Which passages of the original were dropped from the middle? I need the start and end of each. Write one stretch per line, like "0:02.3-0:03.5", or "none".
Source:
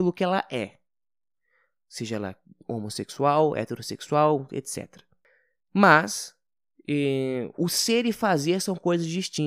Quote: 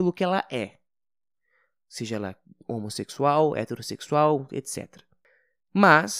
none